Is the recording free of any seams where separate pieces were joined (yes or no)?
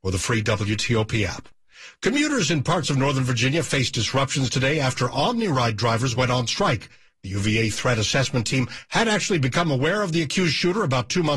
no